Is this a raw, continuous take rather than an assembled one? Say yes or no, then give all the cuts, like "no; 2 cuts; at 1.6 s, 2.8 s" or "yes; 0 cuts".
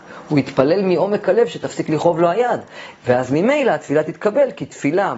no; 1 cut; at 3.0 s